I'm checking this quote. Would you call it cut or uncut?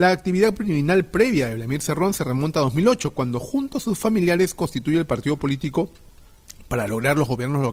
uncut